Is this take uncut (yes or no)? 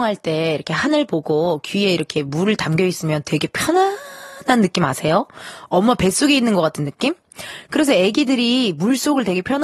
yes